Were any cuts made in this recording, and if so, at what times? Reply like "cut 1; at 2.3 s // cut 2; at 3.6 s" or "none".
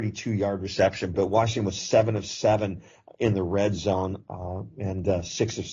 cut 1; at 1.1 s